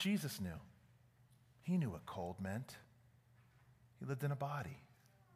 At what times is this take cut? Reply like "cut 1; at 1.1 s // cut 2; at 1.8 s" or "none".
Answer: none